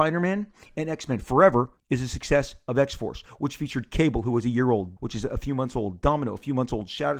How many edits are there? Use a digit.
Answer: 2